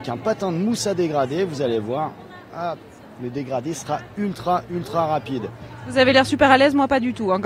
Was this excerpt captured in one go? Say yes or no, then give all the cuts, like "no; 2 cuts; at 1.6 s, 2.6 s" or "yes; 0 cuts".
yes; 0 cuts